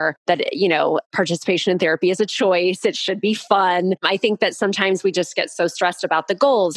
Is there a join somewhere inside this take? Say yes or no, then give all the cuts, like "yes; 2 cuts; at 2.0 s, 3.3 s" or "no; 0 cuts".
no; 0 cuts